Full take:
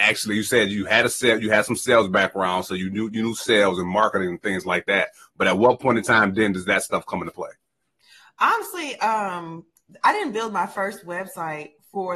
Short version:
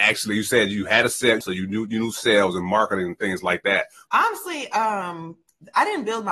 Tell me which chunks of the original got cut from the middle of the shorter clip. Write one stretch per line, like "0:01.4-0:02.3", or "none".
0:01.4-0:02.6
0:05.3-0:08.3